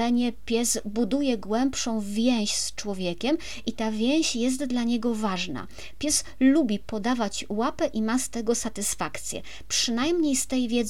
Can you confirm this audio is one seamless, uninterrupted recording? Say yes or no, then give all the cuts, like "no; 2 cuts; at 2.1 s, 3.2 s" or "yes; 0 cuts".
yes; 0 cuts